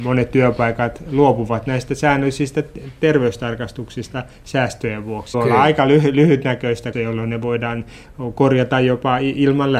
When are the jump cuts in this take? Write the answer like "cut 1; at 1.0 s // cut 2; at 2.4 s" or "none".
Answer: cut 1; at 5.3 s // cut 2; at 6.9 s